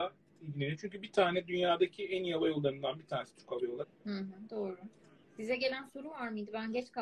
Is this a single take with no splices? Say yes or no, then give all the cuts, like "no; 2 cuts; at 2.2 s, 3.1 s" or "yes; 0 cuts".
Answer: no; 2 cuts; at 3.8 s, 5.2 s